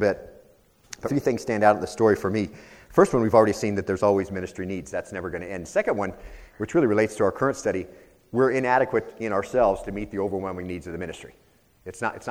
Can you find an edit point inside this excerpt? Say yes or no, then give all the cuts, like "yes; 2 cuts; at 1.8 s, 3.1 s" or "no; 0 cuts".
yes; 1 cut; at 1.0 s